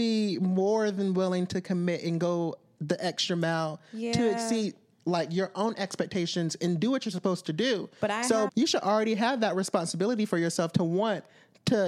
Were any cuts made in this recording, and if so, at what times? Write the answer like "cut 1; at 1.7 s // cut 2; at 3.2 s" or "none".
cut 1; at 8.5 s